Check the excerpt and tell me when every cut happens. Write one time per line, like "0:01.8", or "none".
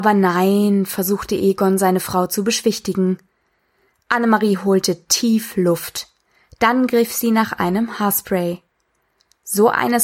none